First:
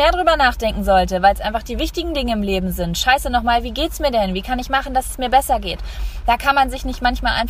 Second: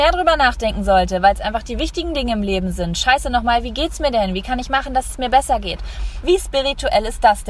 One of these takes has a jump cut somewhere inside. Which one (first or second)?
second